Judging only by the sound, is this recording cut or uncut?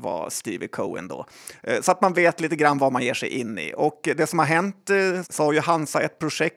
cut